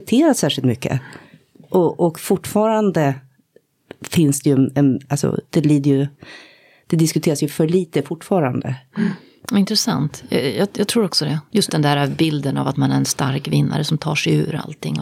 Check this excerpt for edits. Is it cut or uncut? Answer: cut